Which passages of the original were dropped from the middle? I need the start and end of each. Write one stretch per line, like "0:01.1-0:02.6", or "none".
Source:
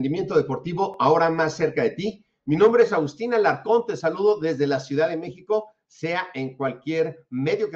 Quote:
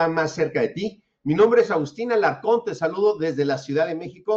none